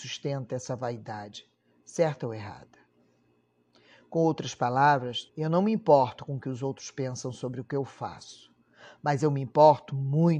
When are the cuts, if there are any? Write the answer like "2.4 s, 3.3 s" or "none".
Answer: 5.3 s